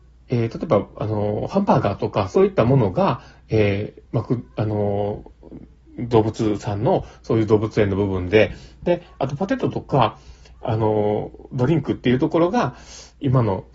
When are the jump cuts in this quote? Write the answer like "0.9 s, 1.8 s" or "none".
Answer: 4.1 s